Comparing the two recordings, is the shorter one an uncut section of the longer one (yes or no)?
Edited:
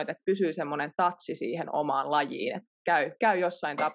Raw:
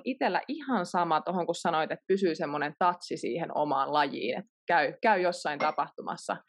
yes